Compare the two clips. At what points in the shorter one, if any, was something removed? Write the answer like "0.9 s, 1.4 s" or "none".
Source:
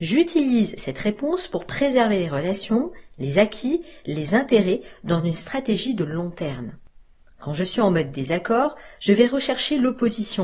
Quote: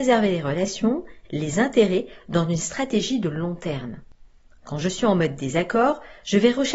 1.2 s